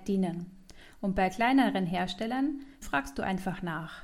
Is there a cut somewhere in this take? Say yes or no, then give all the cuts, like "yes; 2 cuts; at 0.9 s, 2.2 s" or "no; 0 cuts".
yes; 1 cut; at 2.8 s